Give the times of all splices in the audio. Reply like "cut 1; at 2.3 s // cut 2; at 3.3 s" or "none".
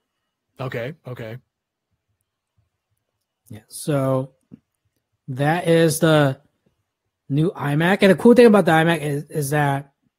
none